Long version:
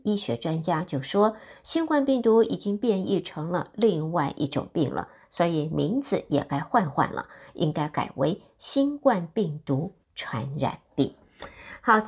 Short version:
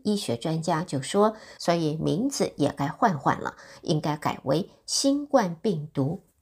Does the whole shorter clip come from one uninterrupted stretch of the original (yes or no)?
no